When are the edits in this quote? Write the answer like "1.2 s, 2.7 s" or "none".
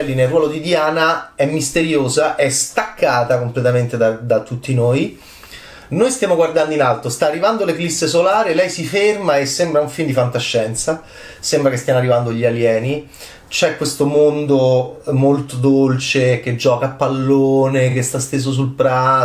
none